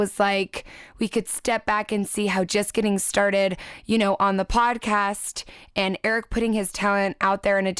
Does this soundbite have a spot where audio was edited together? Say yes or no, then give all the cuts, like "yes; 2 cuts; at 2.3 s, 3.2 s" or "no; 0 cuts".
no; 0 cuts